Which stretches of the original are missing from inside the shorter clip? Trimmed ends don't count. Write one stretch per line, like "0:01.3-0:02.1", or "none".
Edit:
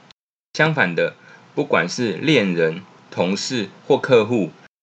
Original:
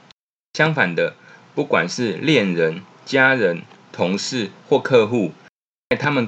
0:03.0-0:03.8